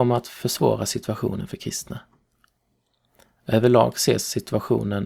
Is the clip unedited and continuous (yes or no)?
yes